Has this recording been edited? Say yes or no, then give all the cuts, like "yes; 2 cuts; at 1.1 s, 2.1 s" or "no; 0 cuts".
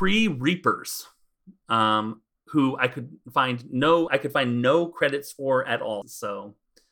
yes; 2 cuts; at 4.1 s, 6.0 s